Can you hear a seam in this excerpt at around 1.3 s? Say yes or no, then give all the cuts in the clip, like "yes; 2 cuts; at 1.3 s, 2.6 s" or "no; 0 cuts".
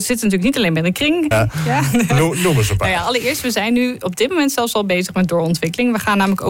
yes; 1 cut; at 1.3 s